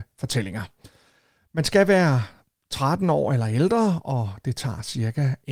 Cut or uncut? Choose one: uncut